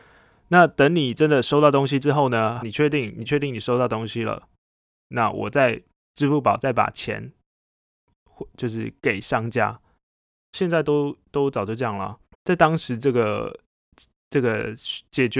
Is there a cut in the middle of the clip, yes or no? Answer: yes